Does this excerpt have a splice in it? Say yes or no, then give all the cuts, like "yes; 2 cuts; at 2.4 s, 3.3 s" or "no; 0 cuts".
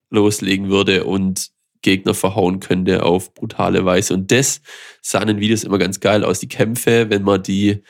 no; 0 cuts